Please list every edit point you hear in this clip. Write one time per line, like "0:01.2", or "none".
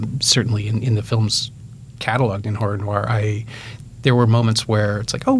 none